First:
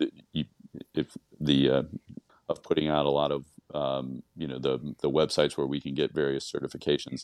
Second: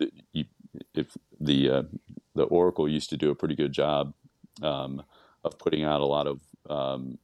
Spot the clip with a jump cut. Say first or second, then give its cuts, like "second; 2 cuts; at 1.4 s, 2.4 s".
first; 1 cut; at 2.3 s